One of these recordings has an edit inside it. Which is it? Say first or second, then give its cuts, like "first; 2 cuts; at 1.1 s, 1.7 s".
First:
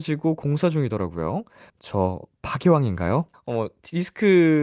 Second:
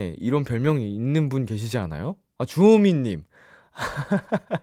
first; 2 cuts; at 1.7 s, 3.3 s